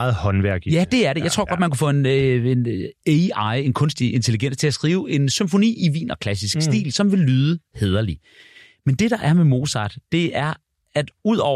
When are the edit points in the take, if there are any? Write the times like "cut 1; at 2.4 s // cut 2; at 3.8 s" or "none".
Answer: none